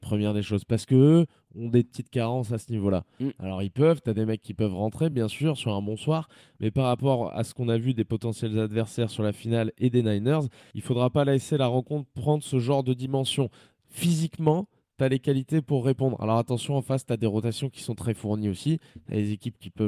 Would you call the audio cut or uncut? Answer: uncut